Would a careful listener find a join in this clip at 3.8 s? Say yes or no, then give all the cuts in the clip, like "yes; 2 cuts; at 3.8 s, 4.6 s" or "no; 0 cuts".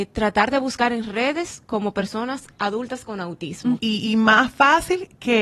yes; 1 cut; at 3.8 s